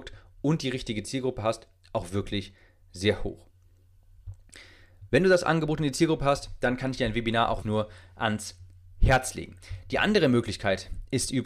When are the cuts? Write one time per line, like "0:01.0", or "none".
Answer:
0:07.6